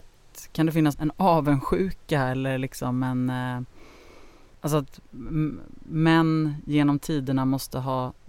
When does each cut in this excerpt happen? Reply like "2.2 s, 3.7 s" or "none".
0.9 s